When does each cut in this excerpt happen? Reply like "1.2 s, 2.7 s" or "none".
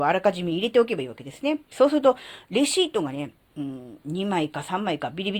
1.7 s